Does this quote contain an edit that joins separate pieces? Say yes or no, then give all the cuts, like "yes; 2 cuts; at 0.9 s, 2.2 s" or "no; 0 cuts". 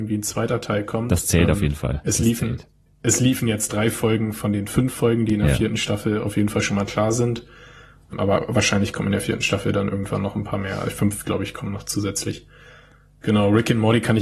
yes; 1 cut; at 2.9 s